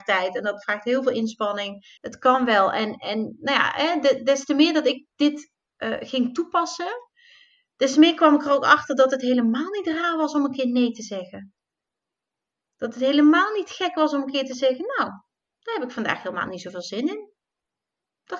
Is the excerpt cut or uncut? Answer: cut